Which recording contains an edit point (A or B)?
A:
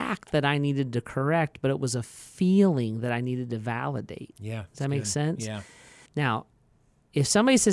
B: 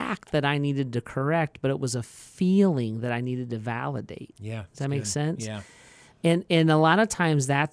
A